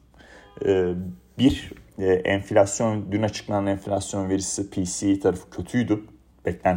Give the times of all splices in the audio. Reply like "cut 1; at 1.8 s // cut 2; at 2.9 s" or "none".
none